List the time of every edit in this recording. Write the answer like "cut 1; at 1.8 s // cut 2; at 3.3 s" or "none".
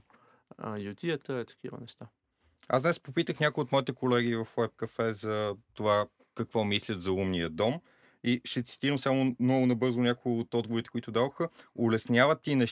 none